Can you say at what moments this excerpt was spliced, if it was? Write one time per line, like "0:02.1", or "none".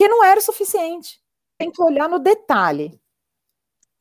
0:01.6